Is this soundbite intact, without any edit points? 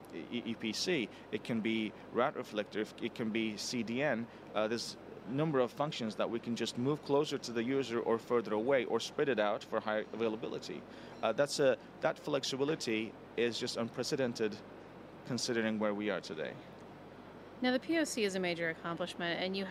yes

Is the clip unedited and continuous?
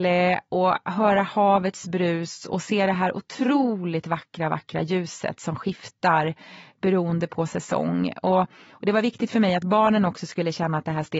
yes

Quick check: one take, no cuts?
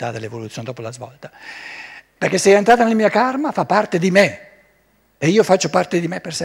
no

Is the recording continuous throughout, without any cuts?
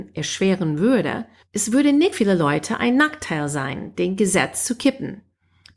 no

